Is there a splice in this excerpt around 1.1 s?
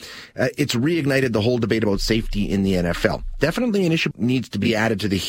no; 1 cut; at 4.1 s

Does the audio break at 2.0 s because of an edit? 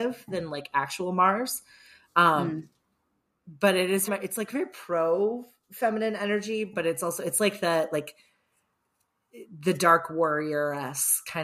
no; 1 cut; at 4.1 s

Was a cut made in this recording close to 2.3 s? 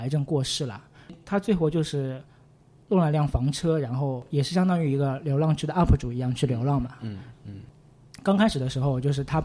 no; 1 cut; at 7.3 s

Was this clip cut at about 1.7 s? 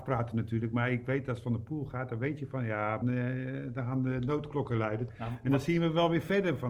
no; 2 cuts; at 3.0 s, 5.1 s

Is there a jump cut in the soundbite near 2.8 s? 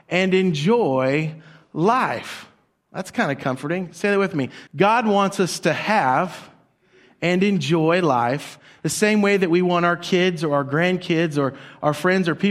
no; 1 cut; at 4.7 s

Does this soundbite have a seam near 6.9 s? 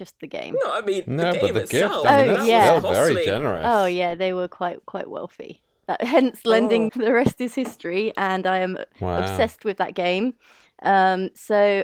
yes; 1 cut; at 6.9 s

